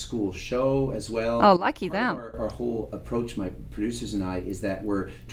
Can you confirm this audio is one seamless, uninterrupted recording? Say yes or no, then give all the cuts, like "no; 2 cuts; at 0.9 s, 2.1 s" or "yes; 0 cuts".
yes; 0 cuts